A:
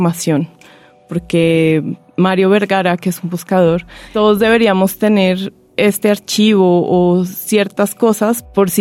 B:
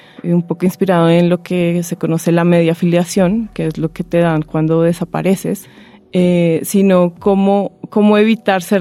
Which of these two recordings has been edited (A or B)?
A